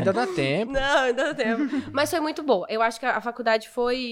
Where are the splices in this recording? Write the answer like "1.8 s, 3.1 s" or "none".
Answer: none